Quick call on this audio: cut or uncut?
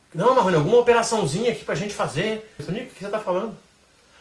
cut